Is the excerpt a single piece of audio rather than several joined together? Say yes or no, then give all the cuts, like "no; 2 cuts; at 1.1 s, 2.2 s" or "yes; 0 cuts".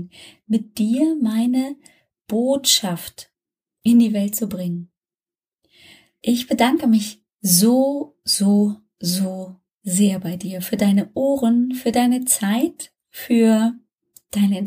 no; 1 cut; at 6.2 s